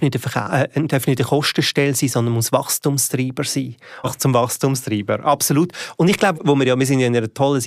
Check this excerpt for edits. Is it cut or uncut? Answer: cut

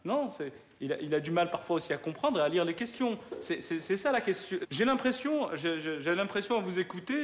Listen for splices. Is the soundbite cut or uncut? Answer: cut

